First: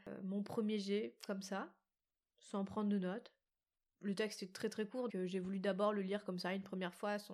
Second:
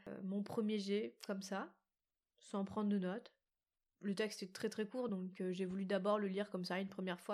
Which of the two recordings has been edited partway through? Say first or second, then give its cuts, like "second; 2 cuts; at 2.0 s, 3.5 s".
first; 1 cut; at 5.1 s